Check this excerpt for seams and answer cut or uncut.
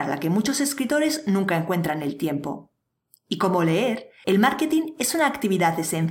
uncut